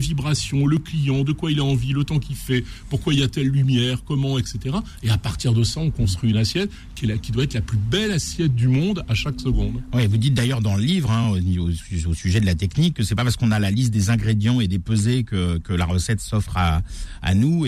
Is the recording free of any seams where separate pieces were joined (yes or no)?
yes